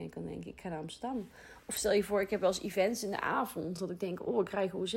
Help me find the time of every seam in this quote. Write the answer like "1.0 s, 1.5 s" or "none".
none